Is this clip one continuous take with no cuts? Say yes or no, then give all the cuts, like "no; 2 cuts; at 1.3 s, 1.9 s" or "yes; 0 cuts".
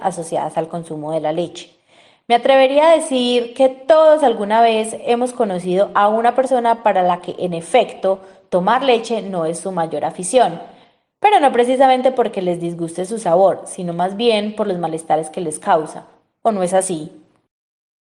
yes; 0 cuts